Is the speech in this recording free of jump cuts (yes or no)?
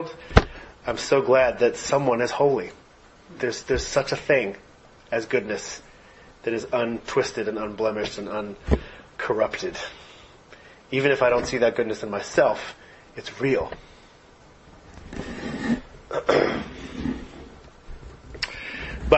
no